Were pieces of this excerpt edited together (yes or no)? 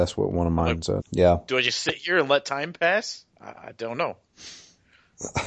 yes